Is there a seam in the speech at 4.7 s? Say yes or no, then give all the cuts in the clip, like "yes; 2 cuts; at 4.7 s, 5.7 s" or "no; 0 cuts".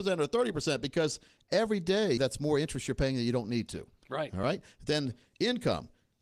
no; 1 cut; at 2.2 s